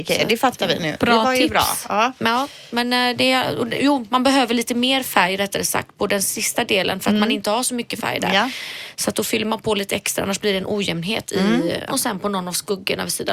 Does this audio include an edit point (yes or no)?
yes